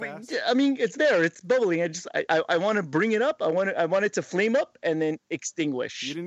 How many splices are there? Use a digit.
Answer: 0